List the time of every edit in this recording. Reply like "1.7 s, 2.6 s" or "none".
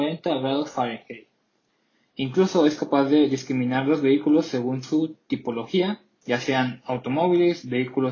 none